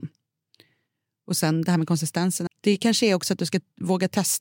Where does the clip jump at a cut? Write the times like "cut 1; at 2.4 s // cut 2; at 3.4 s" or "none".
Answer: cut 1; at 2.5 s